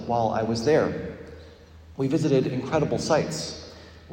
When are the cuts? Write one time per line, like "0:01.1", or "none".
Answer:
0:01.9